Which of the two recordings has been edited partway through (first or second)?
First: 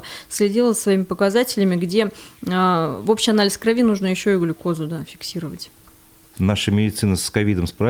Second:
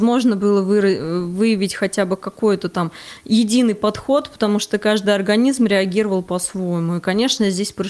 first